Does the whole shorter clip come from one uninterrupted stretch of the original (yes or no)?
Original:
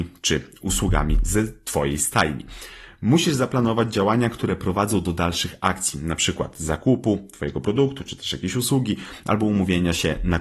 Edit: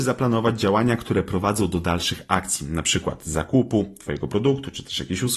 yes